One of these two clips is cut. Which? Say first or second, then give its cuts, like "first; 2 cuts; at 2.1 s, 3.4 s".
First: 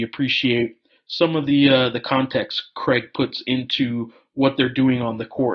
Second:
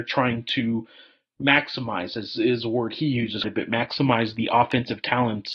second; 1 cut; at 3.4 s